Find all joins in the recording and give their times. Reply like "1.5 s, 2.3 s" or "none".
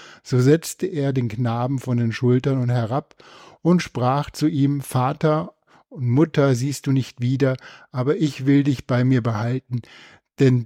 none